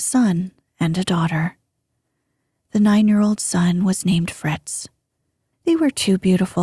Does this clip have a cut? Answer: yes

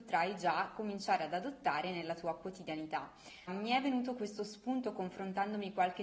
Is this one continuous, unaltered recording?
no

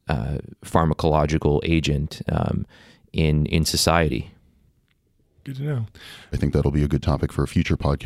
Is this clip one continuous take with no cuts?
no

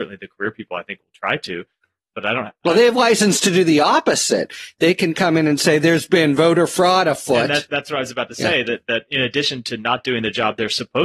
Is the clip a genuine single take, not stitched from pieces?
yes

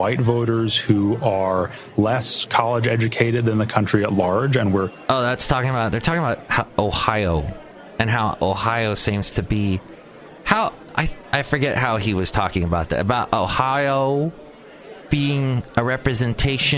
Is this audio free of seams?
yes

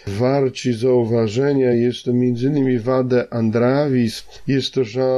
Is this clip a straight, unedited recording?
yes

